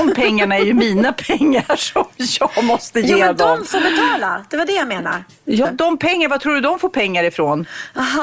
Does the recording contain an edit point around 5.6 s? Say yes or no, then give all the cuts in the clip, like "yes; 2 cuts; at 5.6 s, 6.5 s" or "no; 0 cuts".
yes; 1 cut; at 5.6 s